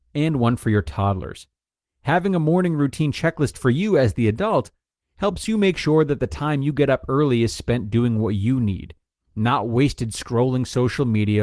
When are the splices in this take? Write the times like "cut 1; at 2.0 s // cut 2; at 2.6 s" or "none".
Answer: none